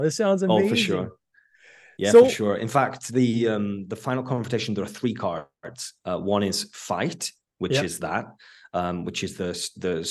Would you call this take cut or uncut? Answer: uncut